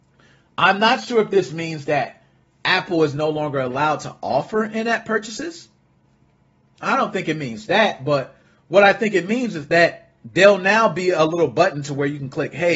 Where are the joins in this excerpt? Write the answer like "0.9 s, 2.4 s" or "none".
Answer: none